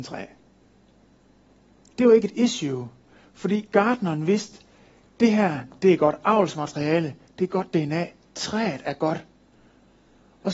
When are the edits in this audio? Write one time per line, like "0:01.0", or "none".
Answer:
none